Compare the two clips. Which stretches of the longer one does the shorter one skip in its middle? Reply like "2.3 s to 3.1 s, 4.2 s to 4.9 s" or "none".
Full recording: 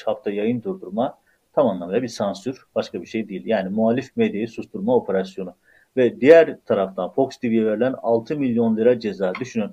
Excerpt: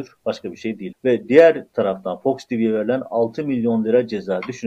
3.4 s to 5.9 s